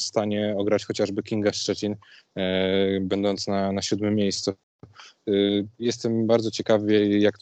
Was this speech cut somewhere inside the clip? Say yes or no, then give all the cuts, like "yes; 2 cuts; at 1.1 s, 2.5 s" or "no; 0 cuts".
yes; 1 cut; at 5.8 s